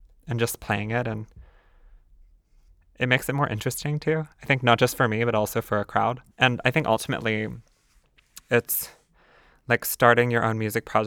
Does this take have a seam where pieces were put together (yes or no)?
yes